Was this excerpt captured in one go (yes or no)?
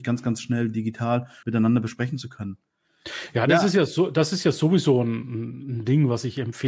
no